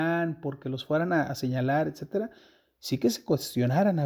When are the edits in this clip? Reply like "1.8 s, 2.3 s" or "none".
none